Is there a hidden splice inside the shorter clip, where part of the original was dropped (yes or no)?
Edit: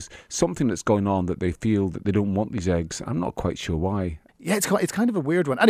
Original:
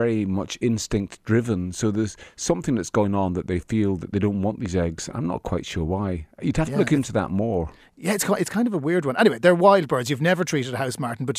yes